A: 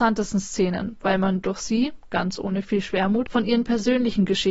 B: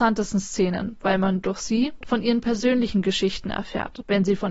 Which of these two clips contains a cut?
B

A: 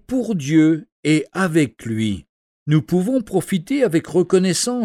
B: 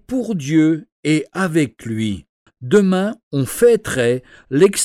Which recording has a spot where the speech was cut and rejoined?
B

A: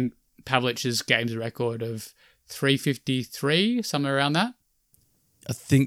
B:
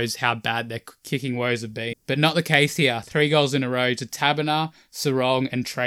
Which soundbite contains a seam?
B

